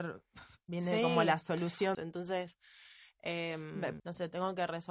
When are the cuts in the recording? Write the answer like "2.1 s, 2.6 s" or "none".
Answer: 1.9 s, 4.0 s